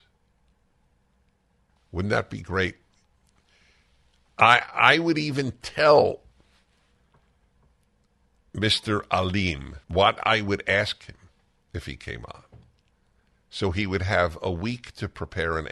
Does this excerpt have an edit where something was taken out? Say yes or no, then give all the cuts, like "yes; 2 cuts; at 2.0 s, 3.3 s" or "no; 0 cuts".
yes; 2 cuts; at 1.8 s, 9.8 s